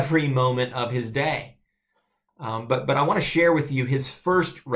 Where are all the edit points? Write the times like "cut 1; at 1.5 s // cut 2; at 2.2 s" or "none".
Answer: cut 1; at 2.3 s